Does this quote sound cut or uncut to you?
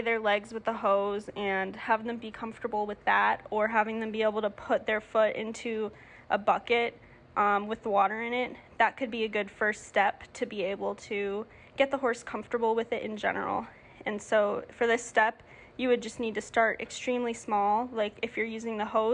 uncut